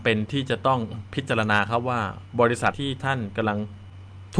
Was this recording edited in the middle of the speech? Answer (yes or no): yes